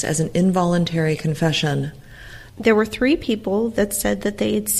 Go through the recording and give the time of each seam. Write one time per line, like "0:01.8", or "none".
0:02.5